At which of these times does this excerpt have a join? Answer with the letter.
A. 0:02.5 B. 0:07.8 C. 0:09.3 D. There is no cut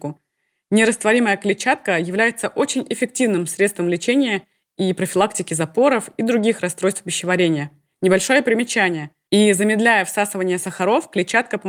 C